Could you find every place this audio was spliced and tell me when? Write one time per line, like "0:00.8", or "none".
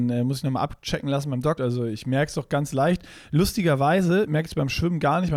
0:01.6